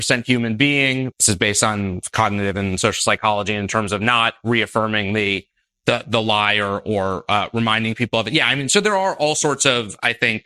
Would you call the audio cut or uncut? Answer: cut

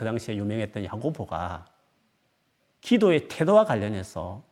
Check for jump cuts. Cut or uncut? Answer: uncut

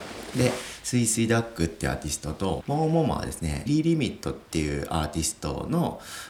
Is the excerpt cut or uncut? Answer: cut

